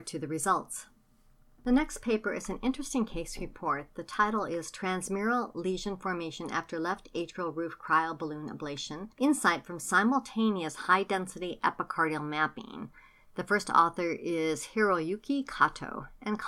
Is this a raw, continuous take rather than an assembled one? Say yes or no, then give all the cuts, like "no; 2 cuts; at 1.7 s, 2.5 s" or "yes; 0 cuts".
yes; 0 cuts